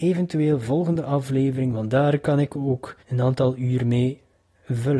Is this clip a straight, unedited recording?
no; 1 cut; at 3.0 s

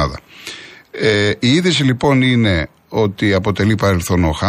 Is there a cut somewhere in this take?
no; 0 cuts

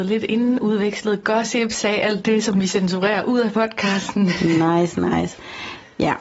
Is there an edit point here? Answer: no; 0 cuts

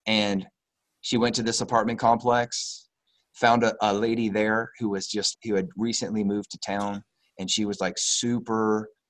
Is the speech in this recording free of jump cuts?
no; 1 cut; at 5.3 s

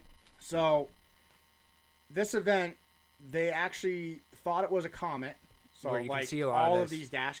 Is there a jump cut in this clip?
yes; 1 cut; at 5.7 s

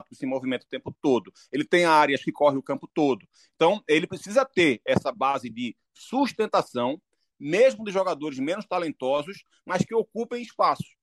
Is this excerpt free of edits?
yes; 0 cuts

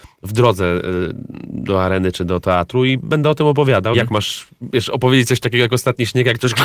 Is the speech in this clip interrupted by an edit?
yes; 1 cut; at 3.9 s

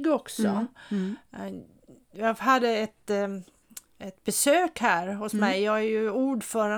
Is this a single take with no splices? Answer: yes; 0 cuts

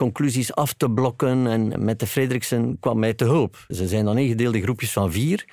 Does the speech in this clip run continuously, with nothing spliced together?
no; 2 cuts; at 1.7 s, 3.7 s

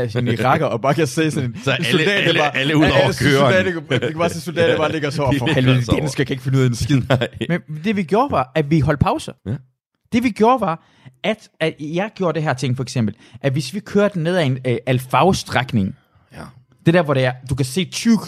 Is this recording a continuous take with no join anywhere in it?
no; 1 cut; at 9.4 s

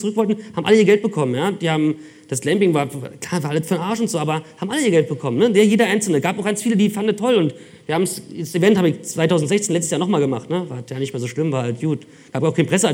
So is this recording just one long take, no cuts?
yes; 0 cuts

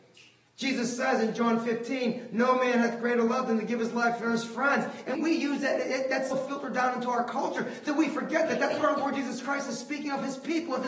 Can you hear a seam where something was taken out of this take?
yes; 2 cuts; at 5.1 s, 6.3 s

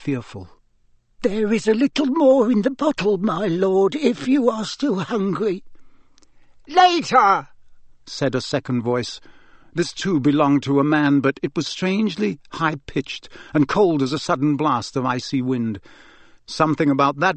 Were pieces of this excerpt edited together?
no; 0 cuts

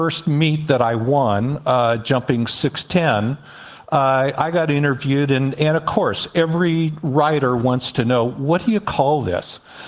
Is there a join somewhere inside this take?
no; 0 cuts

